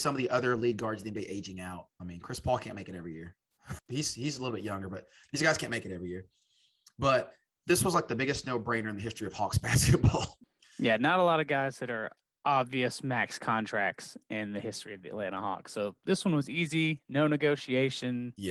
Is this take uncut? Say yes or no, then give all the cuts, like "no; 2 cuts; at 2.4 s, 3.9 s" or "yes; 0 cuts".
no; 1 cut; at 3.8 s